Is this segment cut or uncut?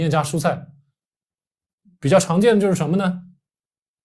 uncut